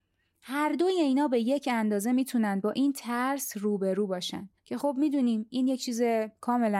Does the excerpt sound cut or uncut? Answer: cut